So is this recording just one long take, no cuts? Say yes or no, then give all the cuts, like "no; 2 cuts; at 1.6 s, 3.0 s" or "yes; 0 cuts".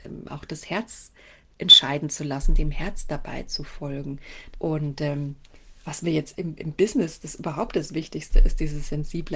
no; 1 cut; at 4.5 s